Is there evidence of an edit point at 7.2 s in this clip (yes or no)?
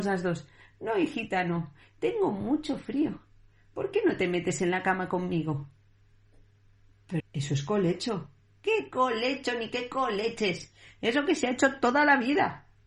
yes